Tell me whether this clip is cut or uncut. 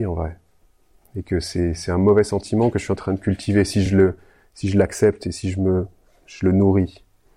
uncut